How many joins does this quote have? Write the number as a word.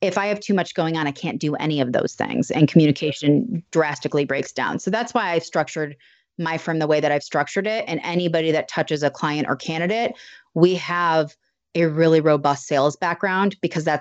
zero